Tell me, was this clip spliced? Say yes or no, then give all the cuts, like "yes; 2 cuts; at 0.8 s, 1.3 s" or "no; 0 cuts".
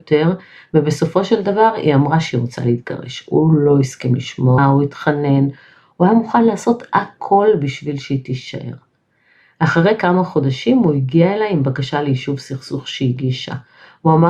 yes; 1 cut; at 4.6 s